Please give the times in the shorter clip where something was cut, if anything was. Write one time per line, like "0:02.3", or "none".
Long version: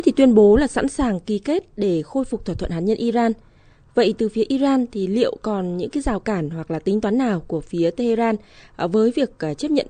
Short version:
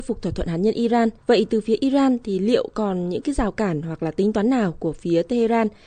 0:01.2